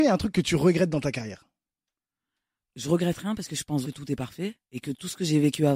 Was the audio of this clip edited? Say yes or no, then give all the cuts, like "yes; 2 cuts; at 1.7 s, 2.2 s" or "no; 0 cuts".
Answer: yes; 2 cuts; at 2.7 s, 3.8 s